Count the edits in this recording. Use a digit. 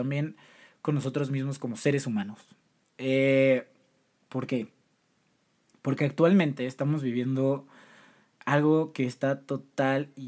0